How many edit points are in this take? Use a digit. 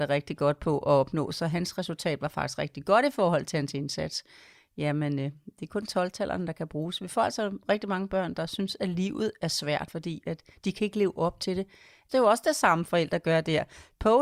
2